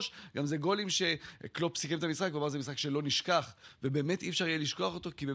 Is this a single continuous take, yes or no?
yes